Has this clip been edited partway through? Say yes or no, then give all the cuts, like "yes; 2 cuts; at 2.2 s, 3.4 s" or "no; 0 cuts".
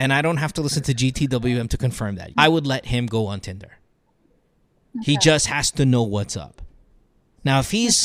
yes; 1 cut; at 2.3 s